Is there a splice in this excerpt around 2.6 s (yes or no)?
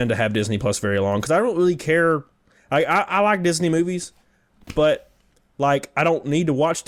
no